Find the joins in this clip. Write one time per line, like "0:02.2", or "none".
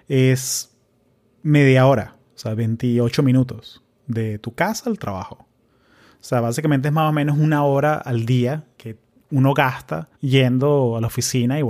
0:08.8
0:10.1